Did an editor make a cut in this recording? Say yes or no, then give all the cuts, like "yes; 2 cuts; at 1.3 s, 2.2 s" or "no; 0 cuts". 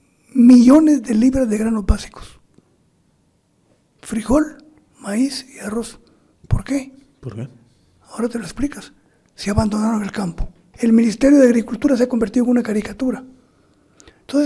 yes; 1 cut; at 10.7 s